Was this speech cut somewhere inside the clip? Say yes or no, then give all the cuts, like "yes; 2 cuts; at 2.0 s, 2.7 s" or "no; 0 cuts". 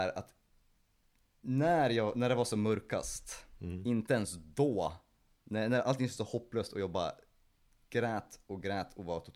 no; 0 cuts